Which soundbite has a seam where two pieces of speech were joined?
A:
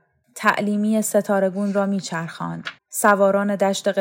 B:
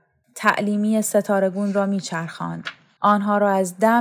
A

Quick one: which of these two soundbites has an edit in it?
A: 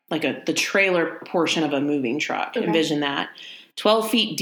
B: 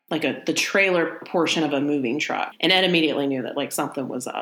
B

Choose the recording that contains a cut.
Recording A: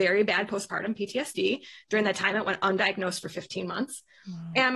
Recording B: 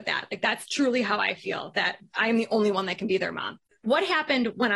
B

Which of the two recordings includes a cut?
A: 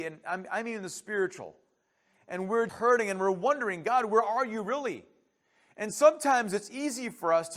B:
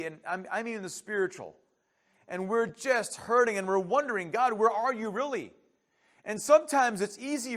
A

